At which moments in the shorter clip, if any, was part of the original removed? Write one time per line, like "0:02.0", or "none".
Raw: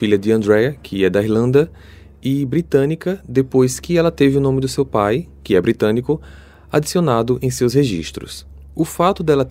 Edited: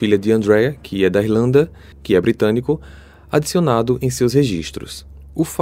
0:01.9